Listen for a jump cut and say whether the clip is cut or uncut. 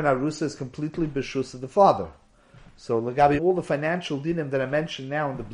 cut